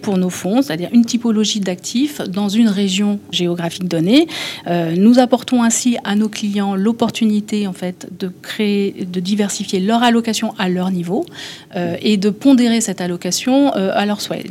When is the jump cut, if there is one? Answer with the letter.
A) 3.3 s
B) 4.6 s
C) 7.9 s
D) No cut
A